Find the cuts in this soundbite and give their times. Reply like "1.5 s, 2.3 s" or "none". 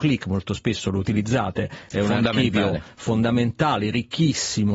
none